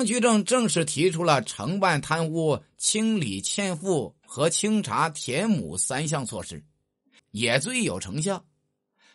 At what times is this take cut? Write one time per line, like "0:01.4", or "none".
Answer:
0:07.2